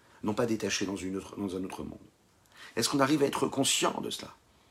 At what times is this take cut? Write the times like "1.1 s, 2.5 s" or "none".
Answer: 2.7 s

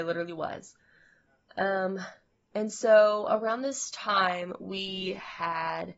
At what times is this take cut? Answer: none

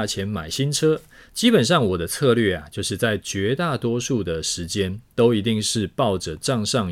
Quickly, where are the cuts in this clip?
1.2 s

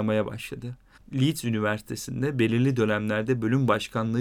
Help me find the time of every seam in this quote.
1.0 s

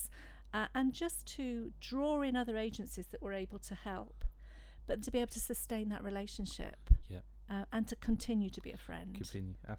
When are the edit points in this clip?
5.0 s

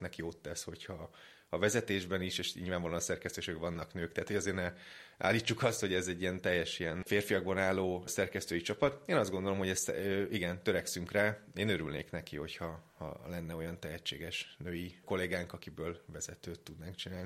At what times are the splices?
none

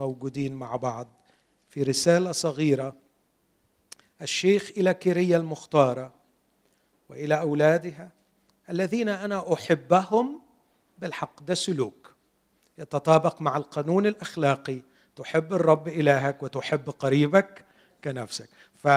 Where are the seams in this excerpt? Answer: none

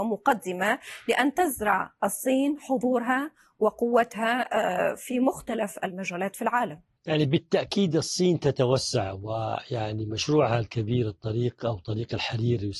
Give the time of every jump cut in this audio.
none

